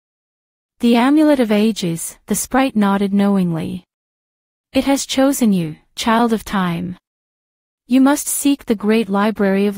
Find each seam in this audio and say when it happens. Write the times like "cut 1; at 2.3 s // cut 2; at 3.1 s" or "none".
none

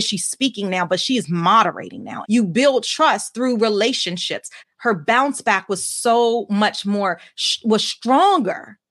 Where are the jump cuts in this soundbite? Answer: cut 1; at 2.2 s // cut 2; at 4.6 s

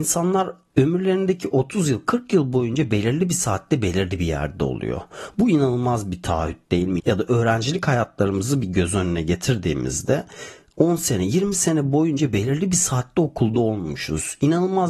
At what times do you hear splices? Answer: cut 1; at 7.0 s

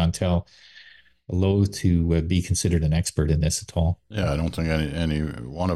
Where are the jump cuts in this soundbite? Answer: none

